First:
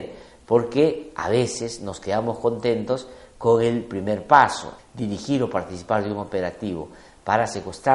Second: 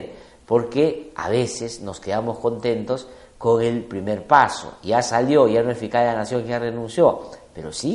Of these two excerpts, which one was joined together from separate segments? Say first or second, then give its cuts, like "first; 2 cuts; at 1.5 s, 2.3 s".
first; 1 cut; at 4.8 s